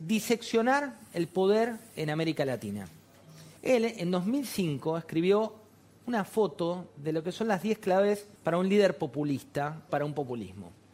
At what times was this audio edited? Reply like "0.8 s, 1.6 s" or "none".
3.6 s, 8.4 s, 9.9 s